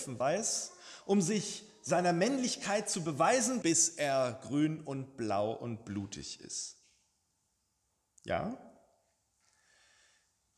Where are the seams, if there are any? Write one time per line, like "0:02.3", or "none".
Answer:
0:03.6